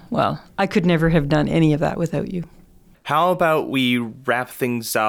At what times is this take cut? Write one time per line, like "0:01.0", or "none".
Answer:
0:02.9